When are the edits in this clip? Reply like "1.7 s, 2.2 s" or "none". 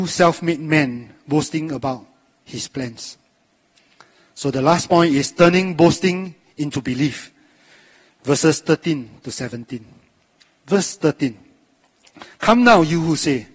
none

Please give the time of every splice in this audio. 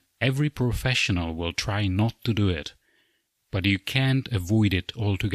none

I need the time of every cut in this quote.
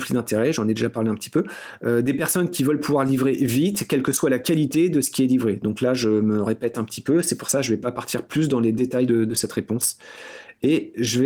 none

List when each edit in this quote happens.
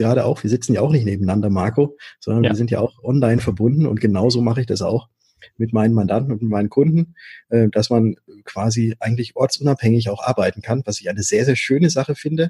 none

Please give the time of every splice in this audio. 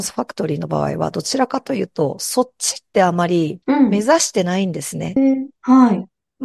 3.6 s, 5.2 s

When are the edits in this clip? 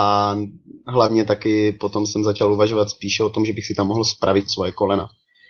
none

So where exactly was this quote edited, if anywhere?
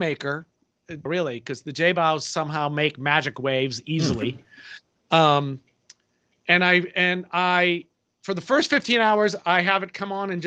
1.1 s

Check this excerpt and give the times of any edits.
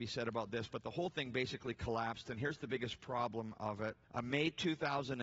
4.0 s

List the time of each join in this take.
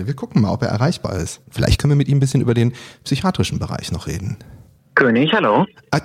1.4 s

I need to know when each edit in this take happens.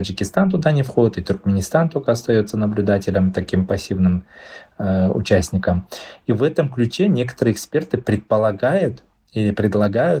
none

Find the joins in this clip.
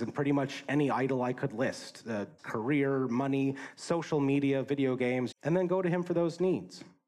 2.4 s, 5.3 s

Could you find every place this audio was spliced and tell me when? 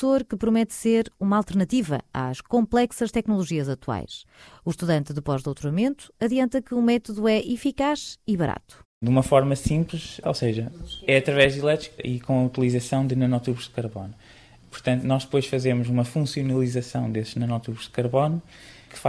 10.2 s

